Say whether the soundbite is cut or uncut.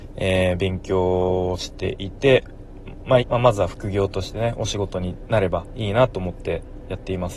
cut